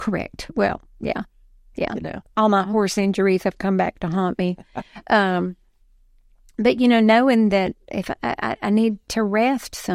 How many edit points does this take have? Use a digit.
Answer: 1